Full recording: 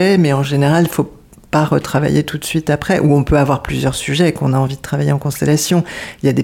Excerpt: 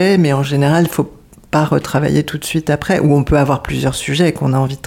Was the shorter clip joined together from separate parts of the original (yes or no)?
no